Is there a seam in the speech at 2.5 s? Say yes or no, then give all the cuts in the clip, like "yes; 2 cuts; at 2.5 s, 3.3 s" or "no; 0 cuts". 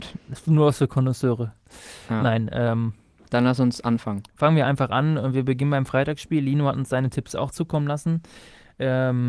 no; 0 cuts